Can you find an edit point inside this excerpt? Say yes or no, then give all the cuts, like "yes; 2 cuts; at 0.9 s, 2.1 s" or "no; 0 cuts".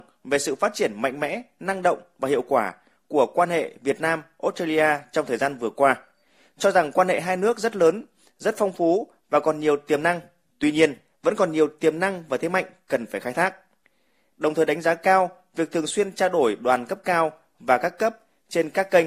yes; 2 cuts; at 10.5 s, 14.3 s